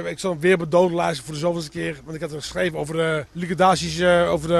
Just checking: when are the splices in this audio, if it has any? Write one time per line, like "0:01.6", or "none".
0:03.3